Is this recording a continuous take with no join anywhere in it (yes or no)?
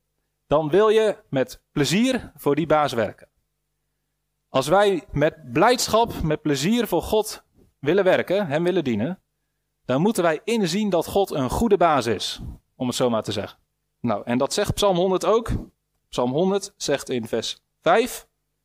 no